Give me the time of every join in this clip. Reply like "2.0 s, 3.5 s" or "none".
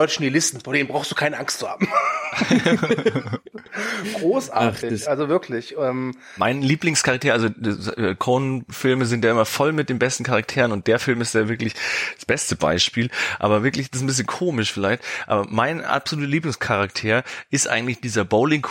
none